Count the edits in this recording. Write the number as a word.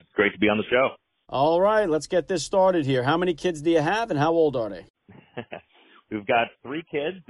zero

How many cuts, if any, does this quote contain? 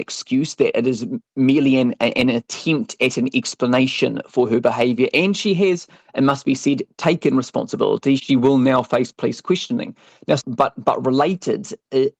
two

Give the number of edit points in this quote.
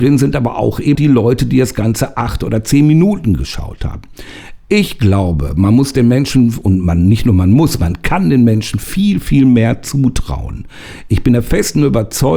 one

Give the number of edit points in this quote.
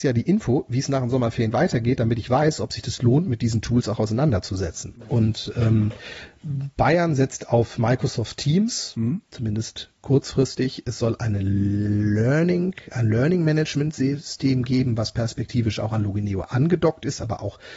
one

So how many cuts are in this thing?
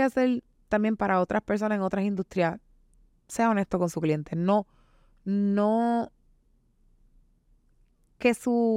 zero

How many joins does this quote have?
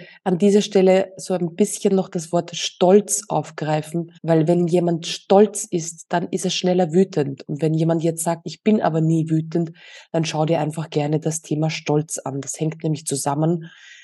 one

